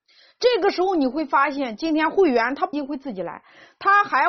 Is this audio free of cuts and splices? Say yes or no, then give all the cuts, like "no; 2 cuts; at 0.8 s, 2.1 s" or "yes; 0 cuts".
no; 1 cut; at 2.7 s